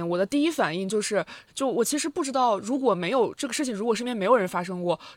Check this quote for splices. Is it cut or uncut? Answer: cut